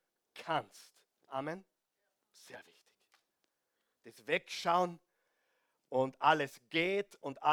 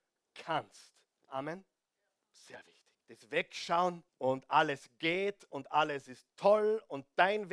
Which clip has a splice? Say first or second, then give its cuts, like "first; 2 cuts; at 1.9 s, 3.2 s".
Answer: second; 2 cuts; at 3.0 s, 4.1 s